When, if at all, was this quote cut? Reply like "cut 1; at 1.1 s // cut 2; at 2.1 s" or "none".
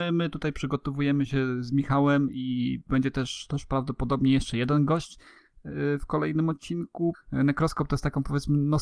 cut 1; at 7.1 s